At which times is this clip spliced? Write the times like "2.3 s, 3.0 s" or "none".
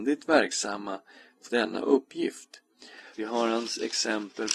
1.5 s, 3.1 s